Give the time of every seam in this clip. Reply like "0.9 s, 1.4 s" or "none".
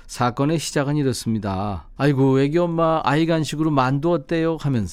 2.0 s

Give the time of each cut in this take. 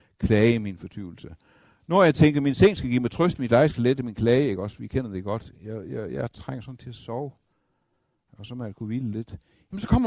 none

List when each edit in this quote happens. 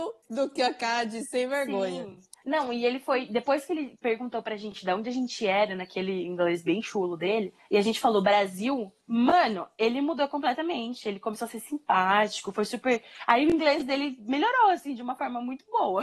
none

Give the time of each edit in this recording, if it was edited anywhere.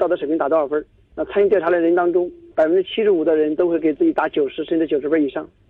none

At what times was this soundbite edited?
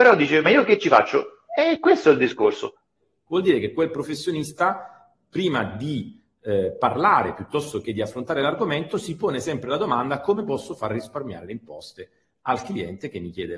3.3 s

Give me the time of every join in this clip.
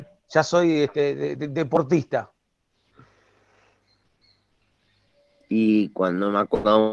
none

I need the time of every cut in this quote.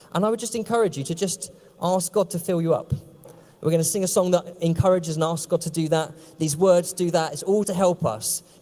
7.6 s

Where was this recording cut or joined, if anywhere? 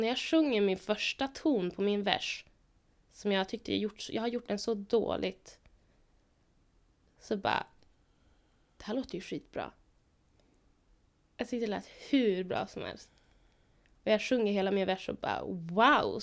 none

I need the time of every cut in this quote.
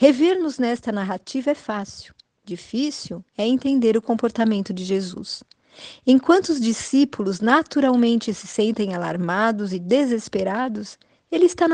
none

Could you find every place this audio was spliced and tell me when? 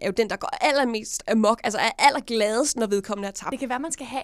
none

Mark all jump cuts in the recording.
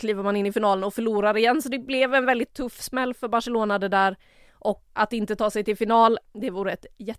5.0 s, 6.2 s

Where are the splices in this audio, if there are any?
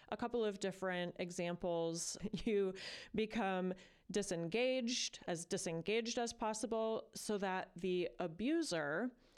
2.2 s

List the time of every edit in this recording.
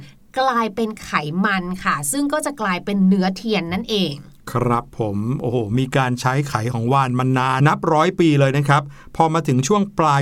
7.6 s

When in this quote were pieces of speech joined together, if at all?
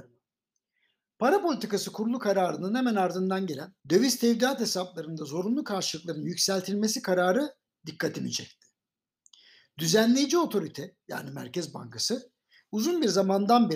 3.8 s

